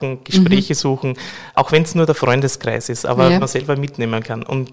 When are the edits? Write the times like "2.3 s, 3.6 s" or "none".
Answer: 1.5 s, 3.4 s